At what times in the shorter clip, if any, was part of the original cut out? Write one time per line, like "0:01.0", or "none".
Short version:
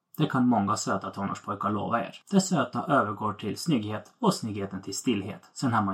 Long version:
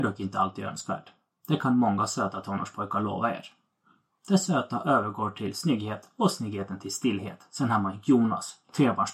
0:02.2